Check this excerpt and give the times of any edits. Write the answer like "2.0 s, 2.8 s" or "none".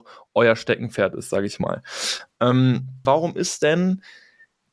3.0 s